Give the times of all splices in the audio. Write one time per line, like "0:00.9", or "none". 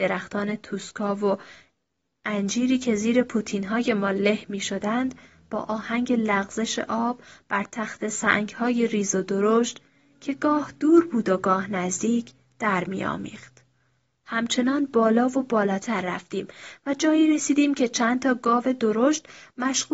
none